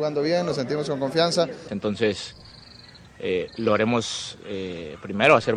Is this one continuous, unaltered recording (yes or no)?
no